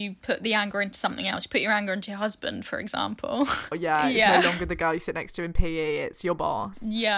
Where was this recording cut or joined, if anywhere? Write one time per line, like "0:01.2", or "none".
0:03.7